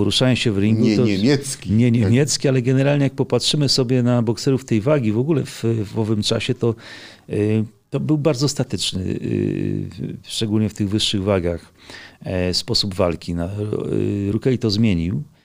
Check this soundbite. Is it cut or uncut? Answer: uncut